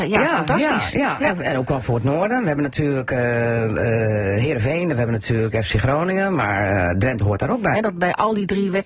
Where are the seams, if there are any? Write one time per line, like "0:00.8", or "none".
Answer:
0:07.7